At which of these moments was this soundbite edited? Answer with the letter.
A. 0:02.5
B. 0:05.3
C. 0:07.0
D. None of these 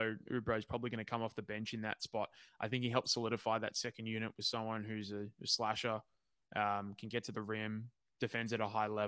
D